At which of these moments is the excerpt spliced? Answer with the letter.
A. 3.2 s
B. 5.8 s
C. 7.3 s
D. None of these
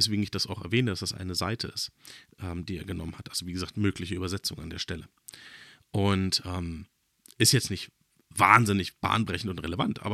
D